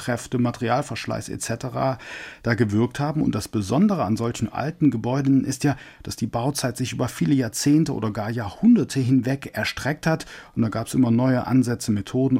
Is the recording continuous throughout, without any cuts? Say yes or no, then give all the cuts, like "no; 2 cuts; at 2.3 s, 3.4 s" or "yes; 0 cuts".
yes; 0 cuts